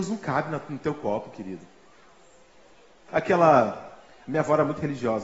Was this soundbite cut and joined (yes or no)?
yes